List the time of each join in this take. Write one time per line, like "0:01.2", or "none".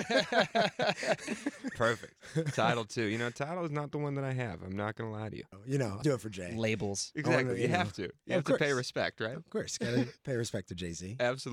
0:06.0